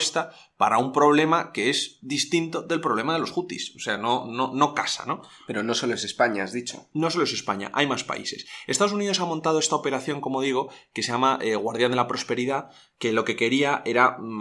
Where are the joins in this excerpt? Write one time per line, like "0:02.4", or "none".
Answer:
none